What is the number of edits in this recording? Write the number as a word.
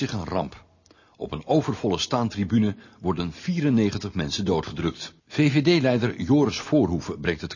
one